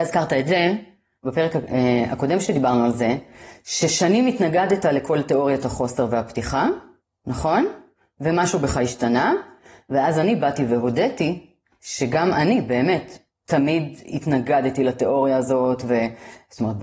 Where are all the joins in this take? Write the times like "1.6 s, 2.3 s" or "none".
none